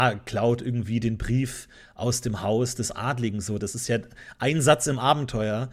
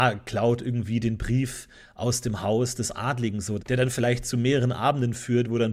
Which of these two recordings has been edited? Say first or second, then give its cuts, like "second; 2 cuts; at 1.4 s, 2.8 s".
second; 1 cut; at 3.6 s